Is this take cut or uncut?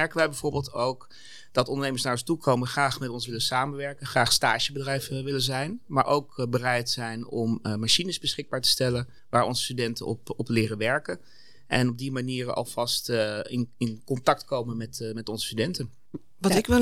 cut